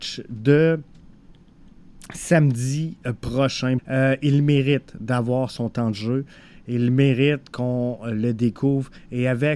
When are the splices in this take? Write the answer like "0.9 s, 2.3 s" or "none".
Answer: 3.8 s